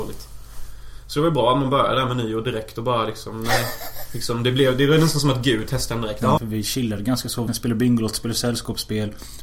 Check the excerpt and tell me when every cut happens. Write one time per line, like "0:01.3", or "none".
0:06.4
0:07.5